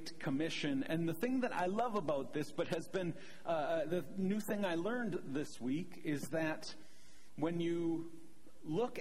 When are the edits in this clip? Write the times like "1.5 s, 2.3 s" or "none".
none